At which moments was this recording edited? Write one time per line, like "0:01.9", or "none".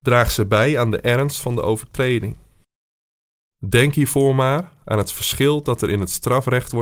none